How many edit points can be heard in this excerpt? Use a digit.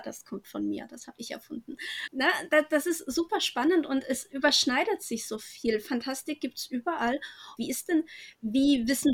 2